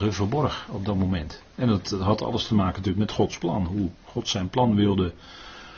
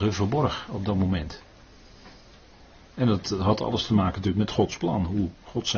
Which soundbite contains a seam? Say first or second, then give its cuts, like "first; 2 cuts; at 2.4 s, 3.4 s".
first; 1 cut; at 1.5 s